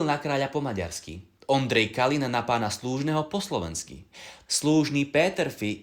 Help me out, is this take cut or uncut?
cut